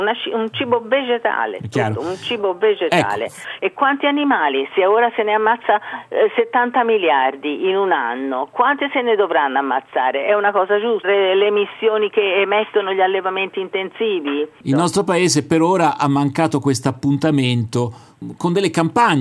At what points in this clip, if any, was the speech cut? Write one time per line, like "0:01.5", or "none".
0:03.6
0:11.0